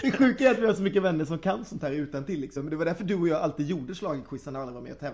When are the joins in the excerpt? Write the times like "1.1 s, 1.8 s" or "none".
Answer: none